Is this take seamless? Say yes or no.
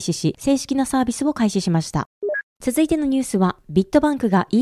yes